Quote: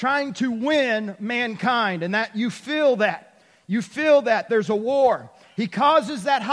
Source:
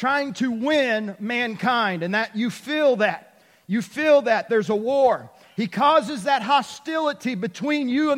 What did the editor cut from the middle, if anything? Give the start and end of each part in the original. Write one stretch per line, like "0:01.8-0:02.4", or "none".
none